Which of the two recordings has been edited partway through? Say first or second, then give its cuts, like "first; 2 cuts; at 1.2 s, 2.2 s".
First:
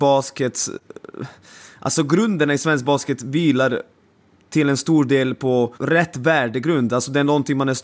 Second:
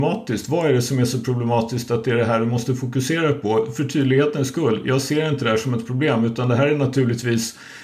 first; 1 cut; at 5.8 s